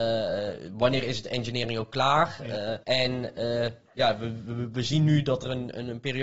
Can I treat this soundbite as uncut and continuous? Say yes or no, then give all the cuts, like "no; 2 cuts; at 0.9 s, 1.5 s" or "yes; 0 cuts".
no; 1 cut; at 2.8 s